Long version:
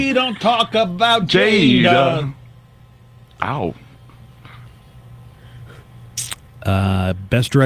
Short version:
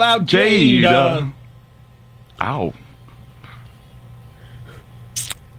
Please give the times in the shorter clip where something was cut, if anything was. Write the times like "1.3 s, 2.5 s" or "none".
none

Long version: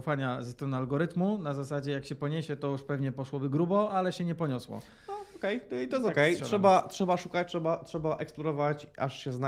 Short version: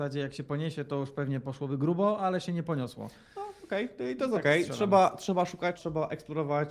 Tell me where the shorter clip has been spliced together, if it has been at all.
5.8 s

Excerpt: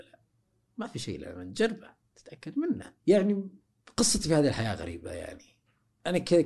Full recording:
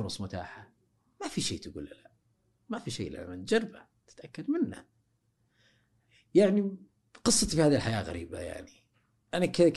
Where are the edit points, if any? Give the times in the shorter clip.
3.0 s

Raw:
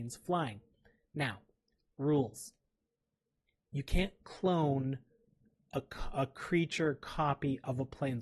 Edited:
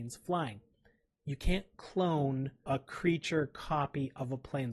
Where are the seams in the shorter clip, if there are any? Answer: 1.1 s, 2.7 s

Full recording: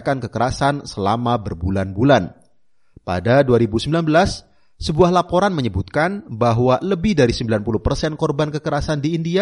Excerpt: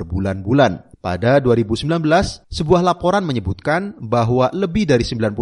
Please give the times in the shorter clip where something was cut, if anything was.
0.9 s, 2.4 s

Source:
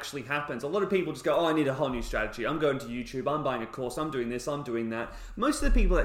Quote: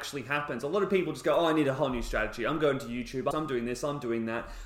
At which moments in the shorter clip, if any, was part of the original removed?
3.3 s

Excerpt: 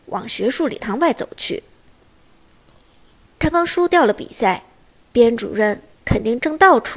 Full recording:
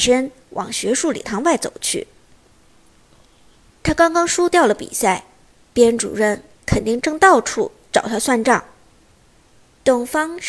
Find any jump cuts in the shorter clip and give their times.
3.5 s

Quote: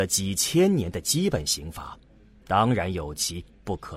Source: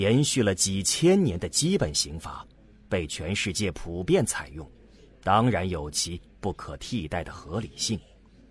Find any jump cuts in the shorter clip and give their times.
2.4 s

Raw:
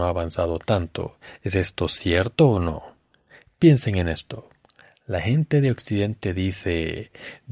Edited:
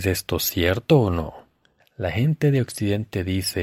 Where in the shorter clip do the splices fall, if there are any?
1.8 s

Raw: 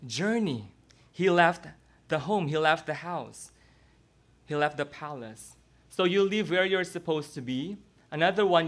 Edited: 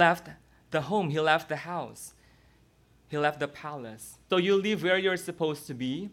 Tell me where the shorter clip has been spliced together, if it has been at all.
4.3 s

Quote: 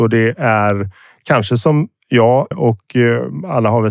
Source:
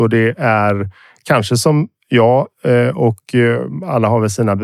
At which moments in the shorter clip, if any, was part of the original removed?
2.5 s

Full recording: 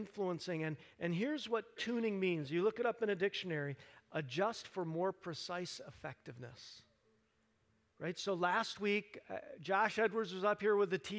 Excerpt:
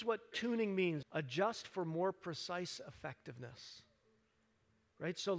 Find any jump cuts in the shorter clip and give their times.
1.0 s

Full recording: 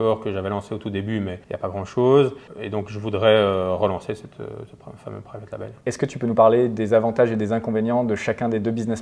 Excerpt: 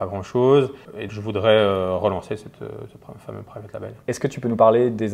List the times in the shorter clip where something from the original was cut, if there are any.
1.1 s

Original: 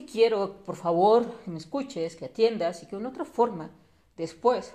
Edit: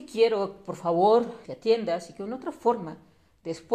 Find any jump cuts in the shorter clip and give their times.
1.4 s

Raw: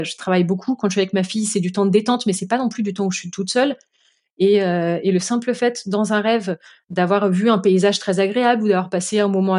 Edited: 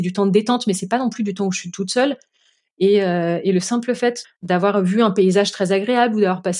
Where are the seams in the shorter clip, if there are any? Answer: 4.2 s

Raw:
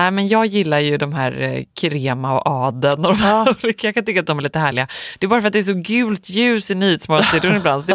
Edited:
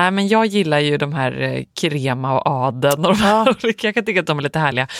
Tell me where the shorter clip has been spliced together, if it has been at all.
none

